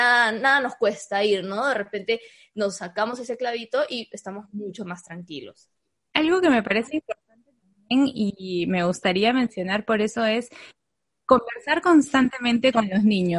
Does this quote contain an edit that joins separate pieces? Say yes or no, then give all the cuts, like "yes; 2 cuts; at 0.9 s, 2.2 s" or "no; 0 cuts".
no; 0 cuts